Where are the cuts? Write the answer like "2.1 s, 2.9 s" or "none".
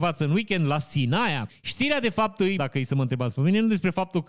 1.5 s, 2.6 s